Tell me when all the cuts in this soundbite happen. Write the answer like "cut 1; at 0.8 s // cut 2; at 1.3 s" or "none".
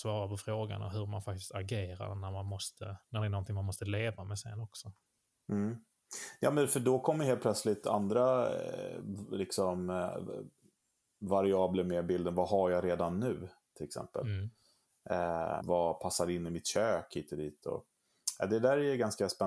cut 1; at 15.6 s